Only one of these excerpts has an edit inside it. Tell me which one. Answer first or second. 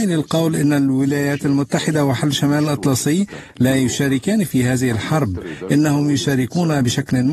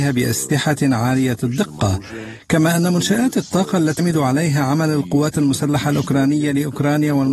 second